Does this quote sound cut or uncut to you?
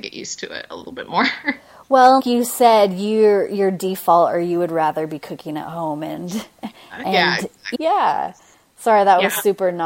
cut